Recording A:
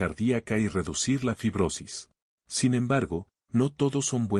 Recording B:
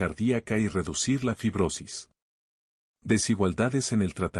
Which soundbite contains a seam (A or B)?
A